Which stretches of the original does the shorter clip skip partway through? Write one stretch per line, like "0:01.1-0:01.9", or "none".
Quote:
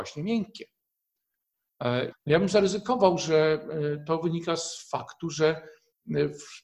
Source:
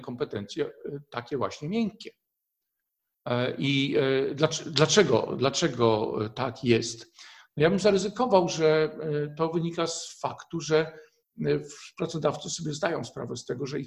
0:03.6-0:07.4